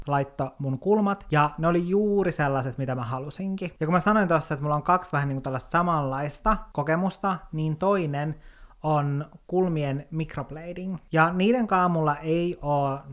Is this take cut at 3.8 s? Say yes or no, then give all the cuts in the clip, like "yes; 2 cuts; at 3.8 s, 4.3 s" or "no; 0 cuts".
yes; 1 cut; at 3.8 s